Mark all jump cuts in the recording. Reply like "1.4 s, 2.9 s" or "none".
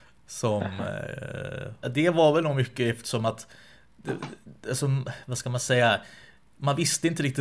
1.8 s

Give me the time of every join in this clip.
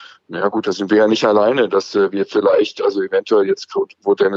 none

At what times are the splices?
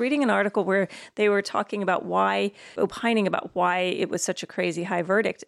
2.8 s

